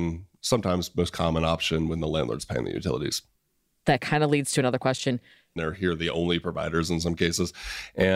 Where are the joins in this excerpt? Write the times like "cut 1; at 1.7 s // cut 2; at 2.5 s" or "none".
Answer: cut 1; at 5.6 s